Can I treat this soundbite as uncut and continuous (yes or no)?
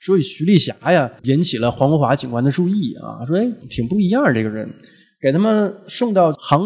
no